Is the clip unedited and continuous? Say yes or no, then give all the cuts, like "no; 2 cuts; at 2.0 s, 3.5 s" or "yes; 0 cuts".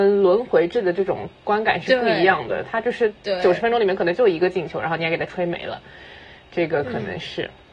yes; 0 cuts